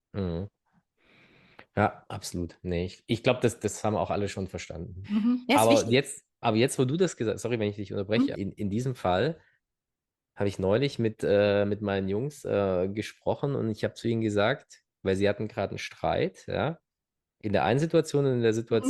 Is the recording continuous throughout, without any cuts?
no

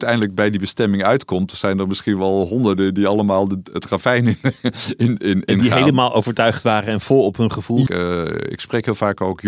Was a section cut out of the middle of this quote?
yes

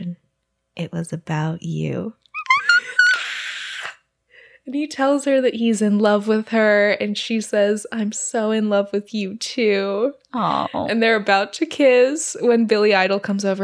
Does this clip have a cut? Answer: no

